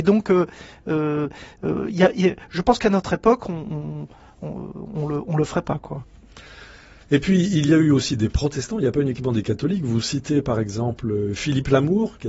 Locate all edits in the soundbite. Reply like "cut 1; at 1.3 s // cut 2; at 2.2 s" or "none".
none